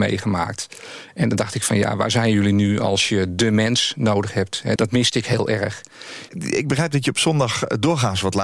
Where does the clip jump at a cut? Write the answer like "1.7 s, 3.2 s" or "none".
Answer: 4.8 s, 6.3 s